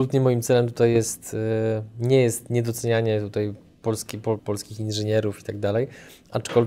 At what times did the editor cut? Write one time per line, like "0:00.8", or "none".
0:04.4